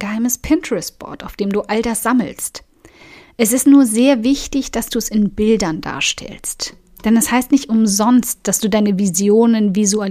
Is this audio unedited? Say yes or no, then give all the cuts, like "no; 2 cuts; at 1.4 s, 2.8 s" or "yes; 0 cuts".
yes; 0 cuts